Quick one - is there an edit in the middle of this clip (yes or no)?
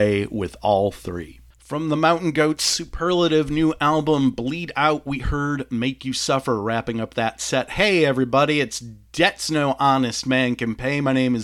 no